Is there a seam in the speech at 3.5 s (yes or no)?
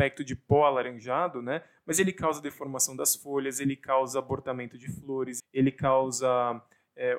no